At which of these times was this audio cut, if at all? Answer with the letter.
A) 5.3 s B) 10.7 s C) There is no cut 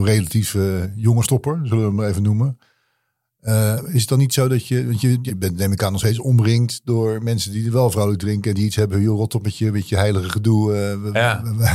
A